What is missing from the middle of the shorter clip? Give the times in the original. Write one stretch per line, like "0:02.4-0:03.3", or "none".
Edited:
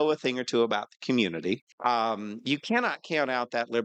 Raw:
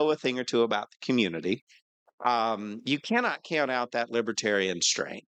0:01.7-0:02.1